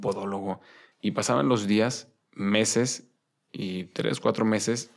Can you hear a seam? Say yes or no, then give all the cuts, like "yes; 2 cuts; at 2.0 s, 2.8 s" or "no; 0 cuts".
yes; 1 cut; at 0.9 s